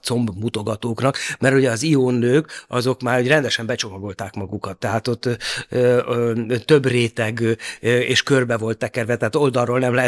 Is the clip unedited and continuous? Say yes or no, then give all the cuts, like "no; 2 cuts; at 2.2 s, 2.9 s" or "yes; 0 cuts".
yes; 0 cuts